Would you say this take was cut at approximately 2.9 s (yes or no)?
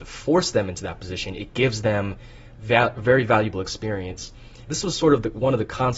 no